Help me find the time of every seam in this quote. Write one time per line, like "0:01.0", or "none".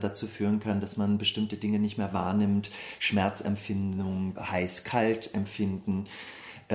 0:04.4